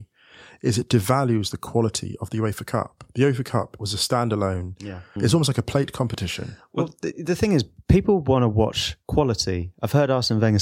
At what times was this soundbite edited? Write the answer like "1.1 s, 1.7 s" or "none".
5.2 s